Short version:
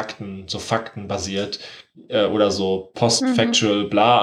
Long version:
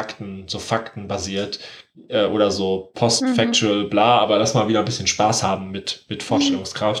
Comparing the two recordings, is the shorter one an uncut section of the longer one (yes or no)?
yes